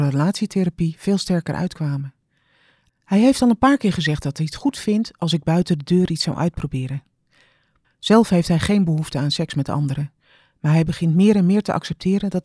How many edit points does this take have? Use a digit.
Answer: 2